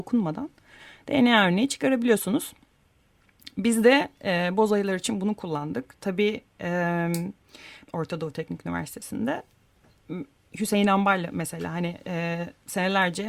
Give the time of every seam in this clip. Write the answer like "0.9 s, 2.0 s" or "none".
7.8 s